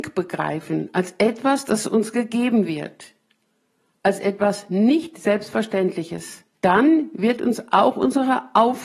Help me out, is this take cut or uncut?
cut